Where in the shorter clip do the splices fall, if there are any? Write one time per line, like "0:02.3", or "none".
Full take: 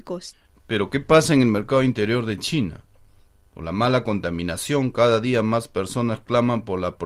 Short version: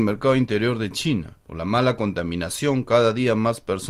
0:01.4